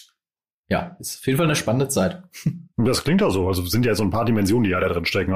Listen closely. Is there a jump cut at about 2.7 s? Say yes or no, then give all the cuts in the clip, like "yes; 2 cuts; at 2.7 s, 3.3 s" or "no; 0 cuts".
yes; 1 cut; at 2.7 s